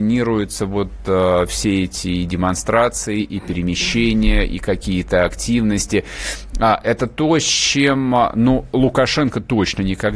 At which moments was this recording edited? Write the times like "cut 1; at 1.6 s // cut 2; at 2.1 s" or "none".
none